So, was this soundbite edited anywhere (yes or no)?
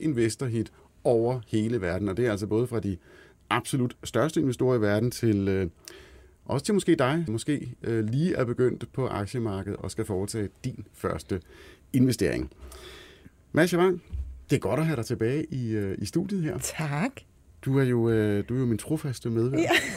yes